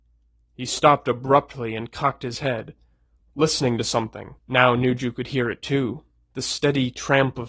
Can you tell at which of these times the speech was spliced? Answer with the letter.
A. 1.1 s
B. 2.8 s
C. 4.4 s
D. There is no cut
C